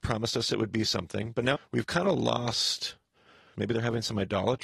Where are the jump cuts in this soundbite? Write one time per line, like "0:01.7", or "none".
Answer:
0:01.6
0:03.5